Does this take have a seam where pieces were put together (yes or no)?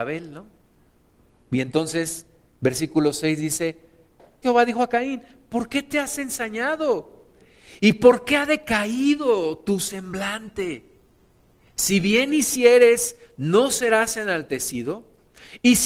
yes